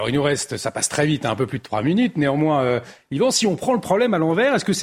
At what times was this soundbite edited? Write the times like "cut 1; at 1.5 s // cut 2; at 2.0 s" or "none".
none

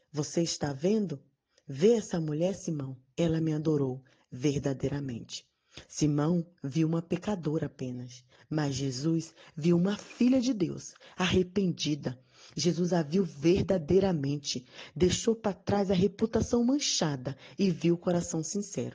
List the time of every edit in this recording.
none

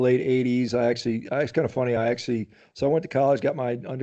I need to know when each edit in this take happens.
none

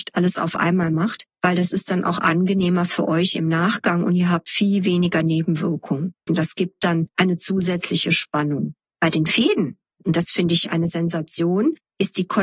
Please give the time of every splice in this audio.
cut 1; at 6.3 s

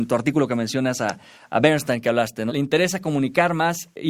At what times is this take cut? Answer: cut 1; at 2.5 s

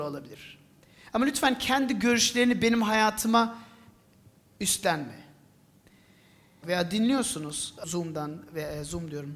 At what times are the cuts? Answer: cut 1; at 6.6 s // cut 2; at 7.8 s

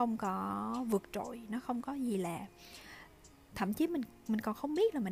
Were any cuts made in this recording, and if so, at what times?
none

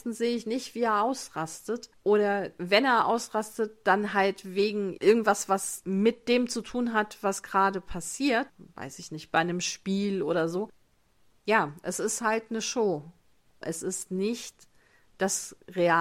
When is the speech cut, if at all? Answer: cut 1; at 13.6 s

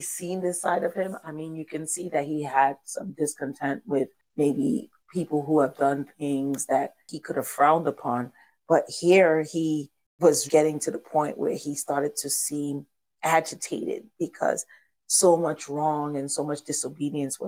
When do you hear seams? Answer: cut 1; at 10.5 s

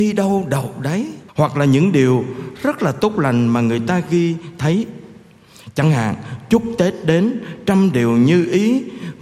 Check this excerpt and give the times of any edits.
cut 1; at 1.3 s

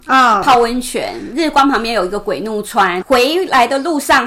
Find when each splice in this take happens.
cut 1; at 3.0 s

